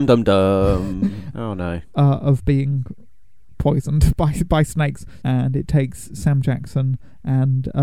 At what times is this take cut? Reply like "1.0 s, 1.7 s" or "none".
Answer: 1.3 s, 5.2 s